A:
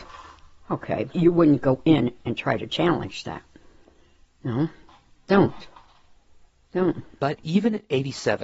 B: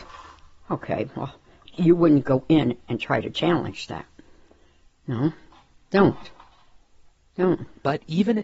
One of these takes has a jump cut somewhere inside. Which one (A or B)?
A